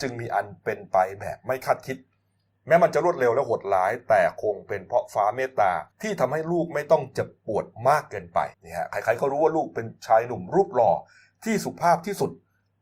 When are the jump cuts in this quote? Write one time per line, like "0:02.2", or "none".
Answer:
0:05.9
0:08.5